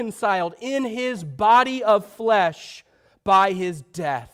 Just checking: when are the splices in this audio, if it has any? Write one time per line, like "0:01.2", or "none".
none